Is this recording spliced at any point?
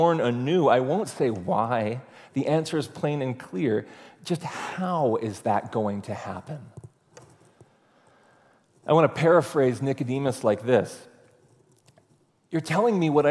no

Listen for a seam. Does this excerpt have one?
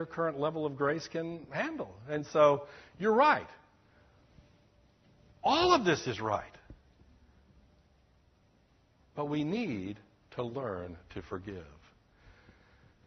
no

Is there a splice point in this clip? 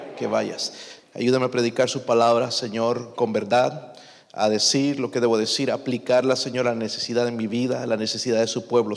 yes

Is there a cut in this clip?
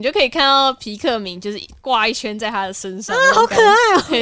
no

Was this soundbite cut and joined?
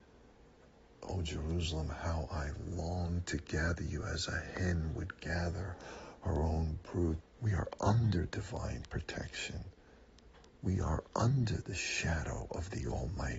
yes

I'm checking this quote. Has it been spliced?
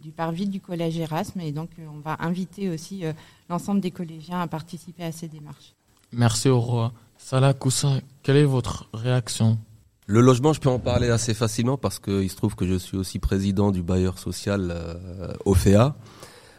no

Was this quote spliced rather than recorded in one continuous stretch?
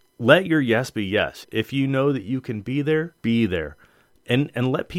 yes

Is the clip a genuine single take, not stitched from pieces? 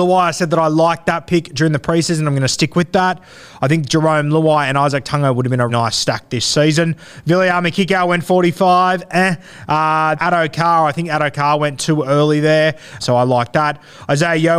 no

